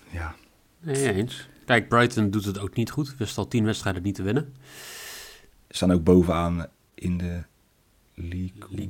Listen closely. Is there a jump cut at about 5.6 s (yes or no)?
yes